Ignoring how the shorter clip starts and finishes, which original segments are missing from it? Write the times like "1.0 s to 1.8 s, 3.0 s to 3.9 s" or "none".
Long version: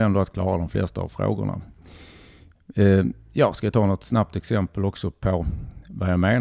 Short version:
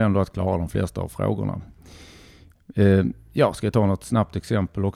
none